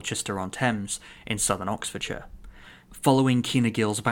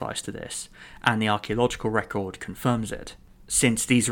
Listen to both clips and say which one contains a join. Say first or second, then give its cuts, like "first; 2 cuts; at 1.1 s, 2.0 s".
first; 1 cut; at 2.8 s